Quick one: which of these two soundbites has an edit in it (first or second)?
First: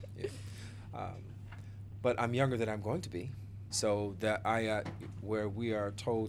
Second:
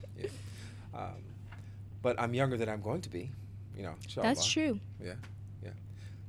first